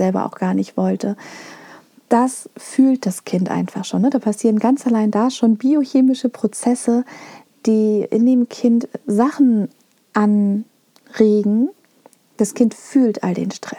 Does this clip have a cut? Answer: no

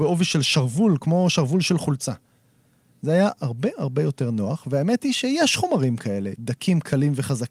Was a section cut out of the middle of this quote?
no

